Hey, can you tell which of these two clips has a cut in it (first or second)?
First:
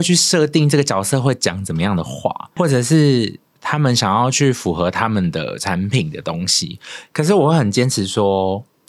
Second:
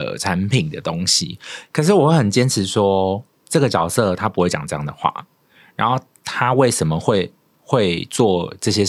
first